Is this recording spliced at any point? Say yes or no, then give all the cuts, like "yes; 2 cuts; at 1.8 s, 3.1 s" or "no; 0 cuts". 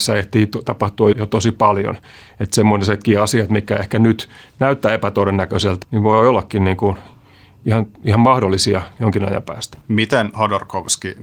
yes; 3 cuts; at 1.1 s, 5.8 s, 9.8 s